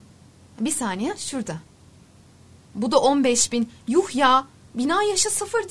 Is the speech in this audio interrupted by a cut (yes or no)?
no